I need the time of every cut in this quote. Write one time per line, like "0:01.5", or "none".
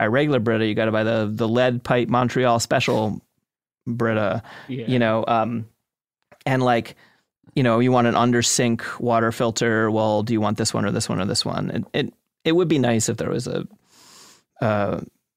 none